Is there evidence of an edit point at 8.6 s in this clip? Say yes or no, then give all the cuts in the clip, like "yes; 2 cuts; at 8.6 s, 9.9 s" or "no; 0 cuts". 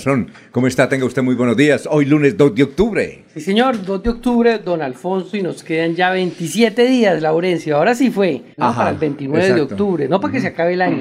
yes; 1 cut; at 8.6 s